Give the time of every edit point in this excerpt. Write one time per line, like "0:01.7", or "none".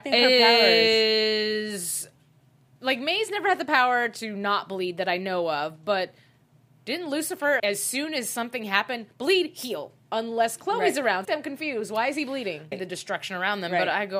0:07.6
0:11.2
0:12.7

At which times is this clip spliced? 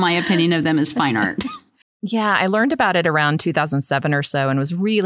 0:01.8

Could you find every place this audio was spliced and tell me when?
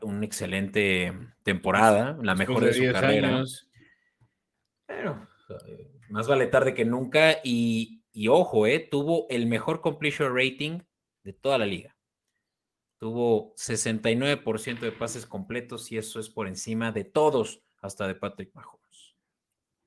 none

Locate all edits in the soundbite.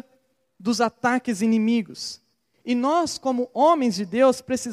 none

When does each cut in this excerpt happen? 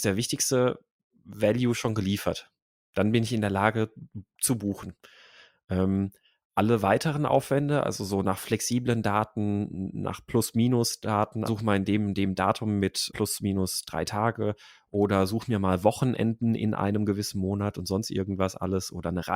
0:11.5
0:13.1

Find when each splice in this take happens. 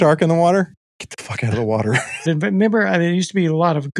0:02.3

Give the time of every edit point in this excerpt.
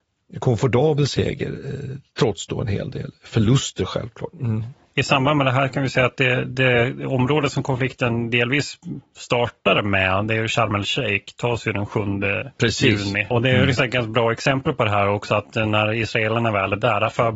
0:04.3
0:13.3

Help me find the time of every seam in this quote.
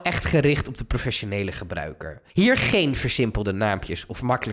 0:02.3

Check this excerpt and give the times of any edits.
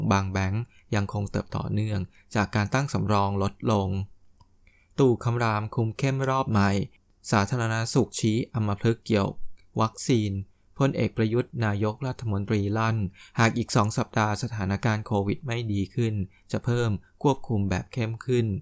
0:01.5

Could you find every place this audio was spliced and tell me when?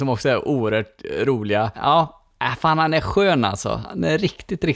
0:01.7

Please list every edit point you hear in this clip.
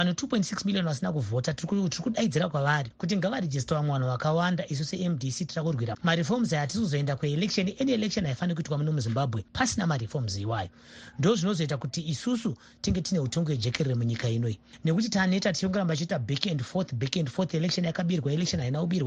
0:05.9

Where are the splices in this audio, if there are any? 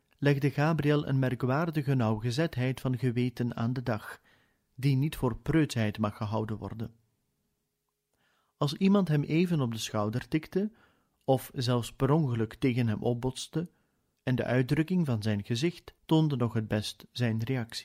0:14.2
0:16.0

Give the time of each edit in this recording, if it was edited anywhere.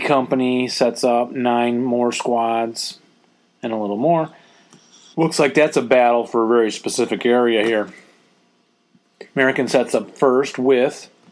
0:05.1
0:09.3

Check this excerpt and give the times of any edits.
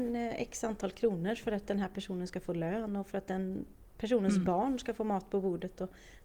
none

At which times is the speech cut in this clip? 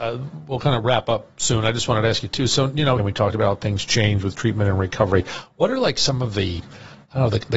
0:03.0

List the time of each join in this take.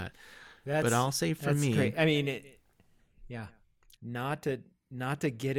0:03.9

